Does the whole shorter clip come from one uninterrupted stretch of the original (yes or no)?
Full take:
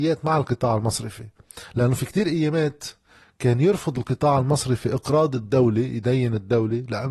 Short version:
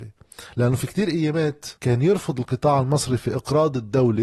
no